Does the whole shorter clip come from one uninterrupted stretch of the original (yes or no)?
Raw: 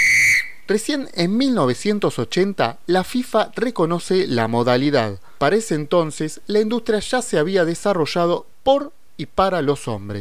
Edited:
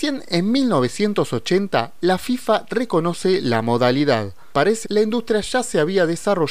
no